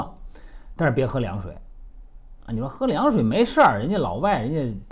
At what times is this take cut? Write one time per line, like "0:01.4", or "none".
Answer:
none